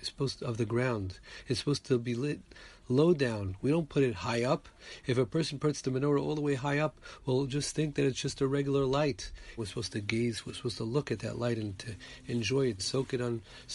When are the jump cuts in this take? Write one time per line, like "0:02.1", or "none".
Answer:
0:09.6
0:12.8